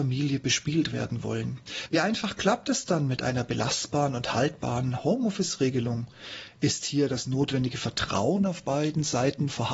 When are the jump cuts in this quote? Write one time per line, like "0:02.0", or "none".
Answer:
none